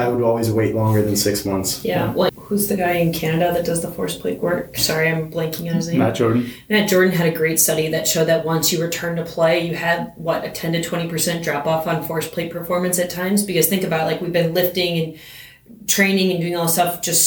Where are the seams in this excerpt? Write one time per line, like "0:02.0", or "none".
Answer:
0:02.3

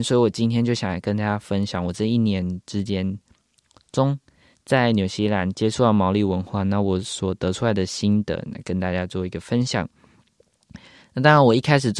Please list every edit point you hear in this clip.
none

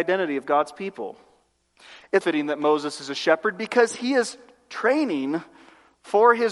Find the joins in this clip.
0:02.2

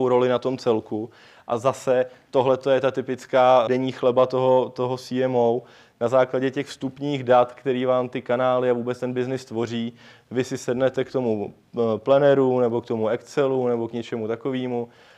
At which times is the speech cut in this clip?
0:03.7

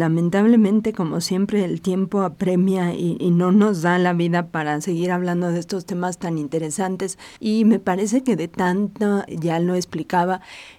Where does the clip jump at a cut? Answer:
0:07.4
0:09.3

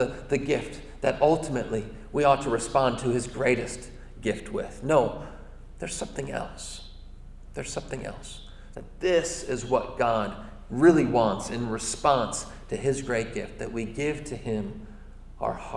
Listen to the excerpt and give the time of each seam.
0:08.7

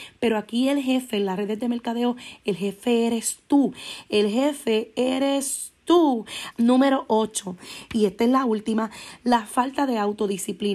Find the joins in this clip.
0:06.5

